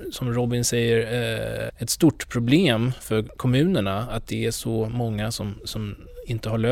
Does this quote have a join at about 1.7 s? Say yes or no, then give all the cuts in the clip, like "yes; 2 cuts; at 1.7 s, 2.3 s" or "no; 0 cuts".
yes; 1 cut; at 1.7 s